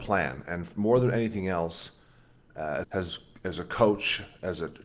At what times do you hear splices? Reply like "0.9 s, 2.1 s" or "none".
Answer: 2.8 s